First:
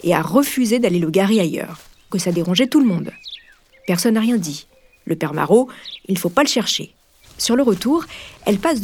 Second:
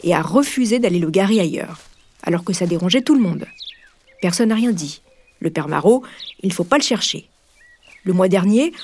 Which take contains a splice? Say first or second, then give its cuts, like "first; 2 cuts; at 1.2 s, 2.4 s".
first; 2 cuts; at 2.1 s, 7.2 s